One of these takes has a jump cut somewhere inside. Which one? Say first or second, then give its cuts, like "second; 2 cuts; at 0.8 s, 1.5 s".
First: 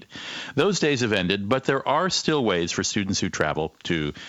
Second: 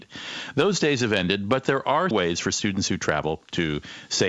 second; 1 cut; at 2.1 s